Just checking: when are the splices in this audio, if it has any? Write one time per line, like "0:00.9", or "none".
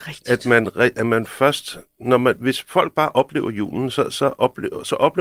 none